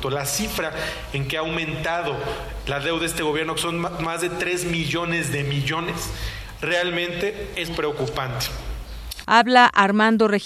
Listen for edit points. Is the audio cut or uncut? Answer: cut